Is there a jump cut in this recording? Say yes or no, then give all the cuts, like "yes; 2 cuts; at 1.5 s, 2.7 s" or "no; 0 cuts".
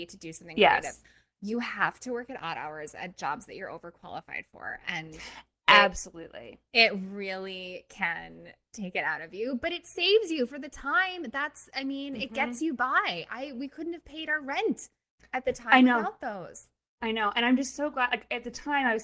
no; 0 cuts